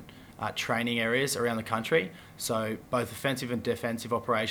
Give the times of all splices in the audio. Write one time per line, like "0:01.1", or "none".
none